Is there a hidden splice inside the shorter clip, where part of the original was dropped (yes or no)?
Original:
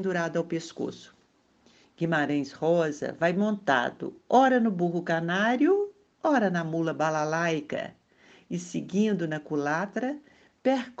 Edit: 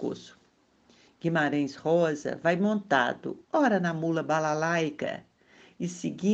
yes